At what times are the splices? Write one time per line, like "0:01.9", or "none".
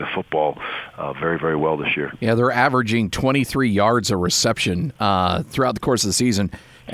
none